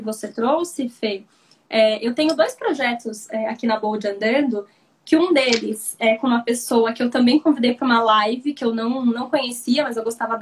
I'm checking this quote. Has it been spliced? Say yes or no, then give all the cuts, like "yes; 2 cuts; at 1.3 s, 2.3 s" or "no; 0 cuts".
no; 0 cuts